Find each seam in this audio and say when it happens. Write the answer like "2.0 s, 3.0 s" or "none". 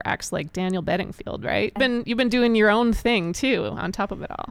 1.8 s